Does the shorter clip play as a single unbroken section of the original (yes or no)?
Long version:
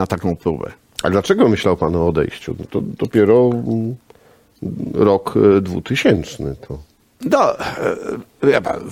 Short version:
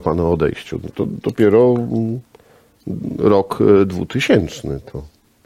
yes